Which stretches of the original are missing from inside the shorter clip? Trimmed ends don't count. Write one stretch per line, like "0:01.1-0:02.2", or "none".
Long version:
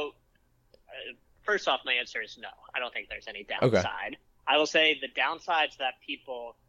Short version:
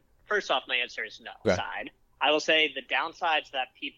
0:02.6-0:03.7